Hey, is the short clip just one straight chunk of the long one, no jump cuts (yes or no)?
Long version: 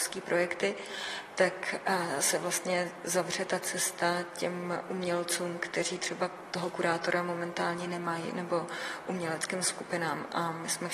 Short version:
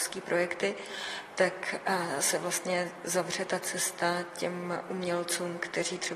yes